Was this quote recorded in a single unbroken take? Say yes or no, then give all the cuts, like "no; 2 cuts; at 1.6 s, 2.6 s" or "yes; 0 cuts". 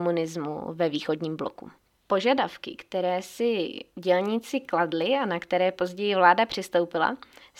yes; 0 cuts